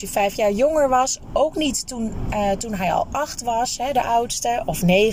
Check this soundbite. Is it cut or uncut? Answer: uncut